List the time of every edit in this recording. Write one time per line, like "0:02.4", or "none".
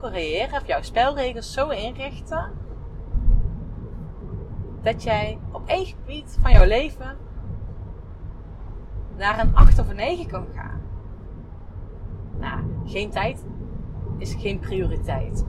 0:09.1
0:12.3